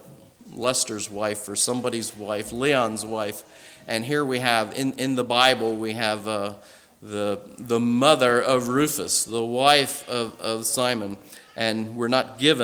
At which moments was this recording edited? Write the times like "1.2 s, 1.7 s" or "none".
none